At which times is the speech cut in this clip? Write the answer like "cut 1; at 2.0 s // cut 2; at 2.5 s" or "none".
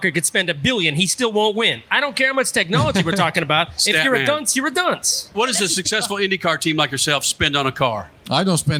cut 1; at 5.3 s